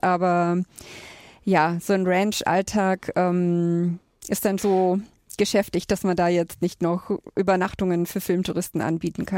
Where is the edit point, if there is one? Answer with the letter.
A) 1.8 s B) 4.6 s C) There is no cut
B